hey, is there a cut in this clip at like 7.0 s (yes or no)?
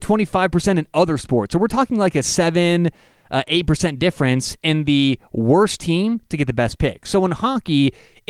no